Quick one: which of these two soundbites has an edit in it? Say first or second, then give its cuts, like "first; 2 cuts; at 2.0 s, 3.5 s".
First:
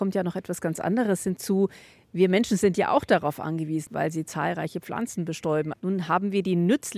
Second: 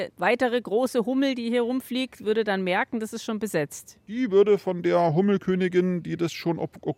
first; 2 cuts; at 3.9 s, 5.7 s